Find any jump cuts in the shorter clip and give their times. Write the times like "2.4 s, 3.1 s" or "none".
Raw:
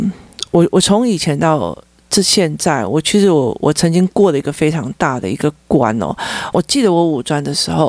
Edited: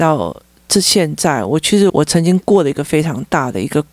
1.9 s